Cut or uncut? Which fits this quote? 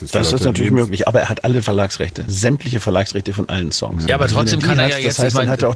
cut